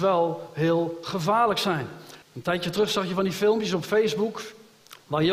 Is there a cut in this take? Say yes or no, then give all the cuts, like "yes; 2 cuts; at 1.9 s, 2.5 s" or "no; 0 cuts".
yes; 1 cut; at 2.2 s